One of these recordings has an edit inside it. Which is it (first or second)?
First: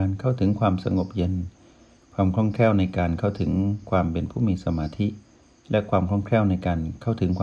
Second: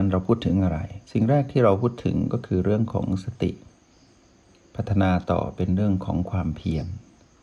second